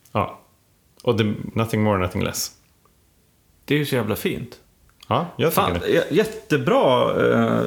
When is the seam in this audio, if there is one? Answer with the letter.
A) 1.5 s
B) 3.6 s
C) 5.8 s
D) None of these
A